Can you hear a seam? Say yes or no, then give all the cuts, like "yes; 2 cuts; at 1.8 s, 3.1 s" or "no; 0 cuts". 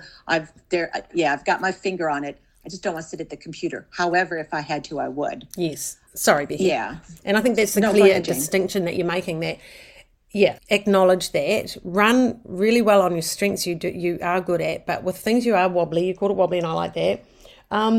yes; 2 cuts; at 6.1 s, 10.6 s